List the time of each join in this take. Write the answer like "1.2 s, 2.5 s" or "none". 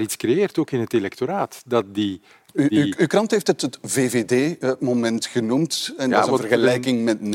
none